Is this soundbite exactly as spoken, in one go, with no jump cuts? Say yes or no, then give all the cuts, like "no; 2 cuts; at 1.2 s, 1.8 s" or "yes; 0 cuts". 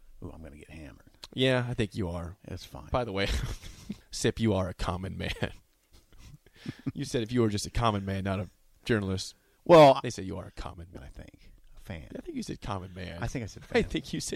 no; 2 cuts; at 4.0 s, 11.0 s